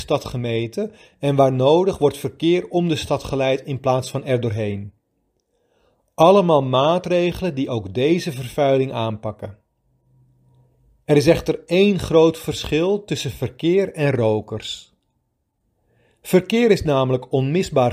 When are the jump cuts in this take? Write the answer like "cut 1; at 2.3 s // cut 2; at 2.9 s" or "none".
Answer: none